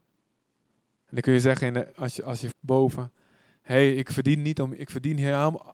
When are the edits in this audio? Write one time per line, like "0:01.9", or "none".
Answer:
0:02.5